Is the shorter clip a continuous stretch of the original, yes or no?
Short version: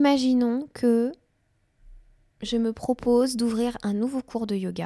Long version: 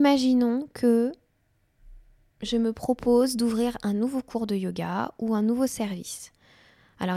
yes